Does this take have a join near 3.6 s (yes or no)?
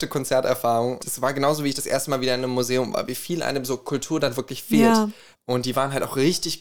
no